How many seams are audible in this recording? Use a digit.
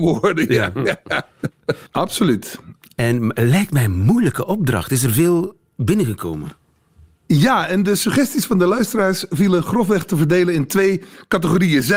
1